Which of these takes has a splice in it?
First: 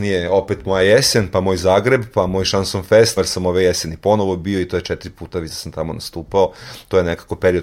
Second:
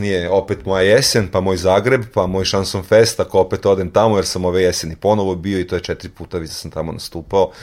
first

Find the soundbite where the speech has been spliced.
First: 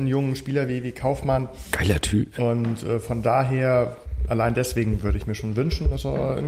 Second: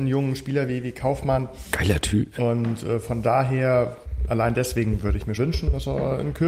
second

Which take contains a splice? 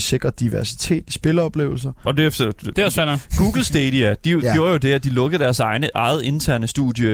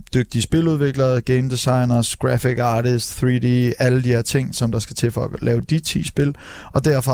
first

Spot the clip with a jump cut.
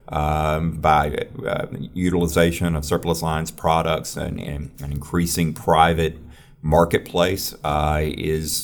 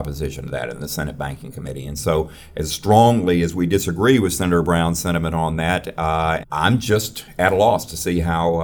second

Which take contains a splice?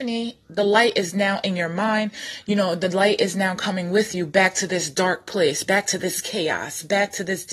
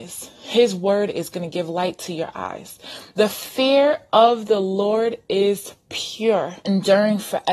second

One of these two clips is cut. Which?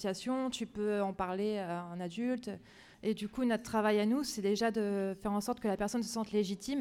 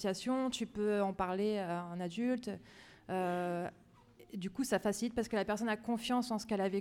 first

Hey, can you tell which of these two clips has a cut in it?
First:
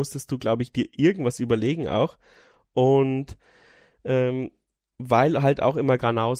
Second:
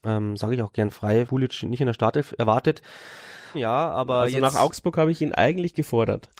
second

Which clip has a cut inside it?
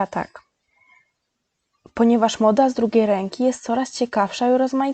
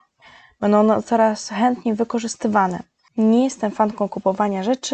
second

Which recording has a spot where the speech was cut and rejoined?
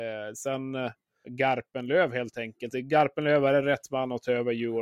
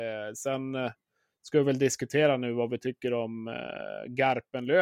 first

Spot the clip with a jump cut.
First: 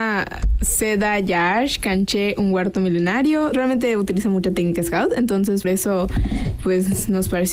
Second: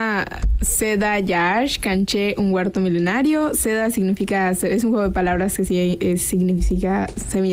first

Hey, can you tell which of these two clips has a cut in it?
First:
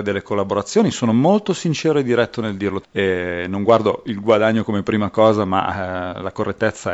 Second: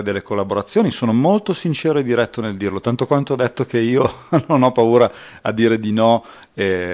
first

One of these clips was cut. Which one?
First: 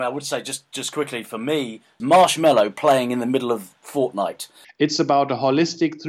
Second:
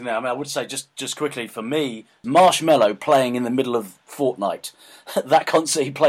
first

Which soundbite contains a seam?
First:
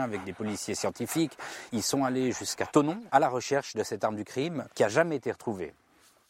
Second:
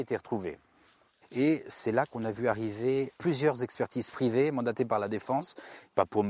first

